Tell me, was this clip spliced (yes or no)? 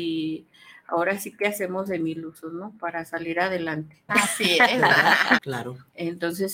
yes